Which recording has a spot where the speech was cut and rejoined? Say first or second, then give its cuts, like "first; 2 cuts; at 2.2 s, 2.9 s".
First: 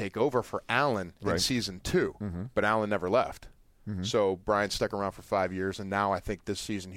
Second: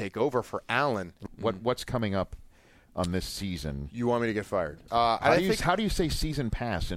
second; 2 cuts; at 1.3 s, 4.9 s